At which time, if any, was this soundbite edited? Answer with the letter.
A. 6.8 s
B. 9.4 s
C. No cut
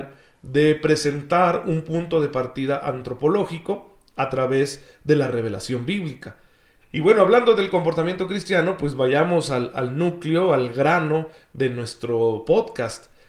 A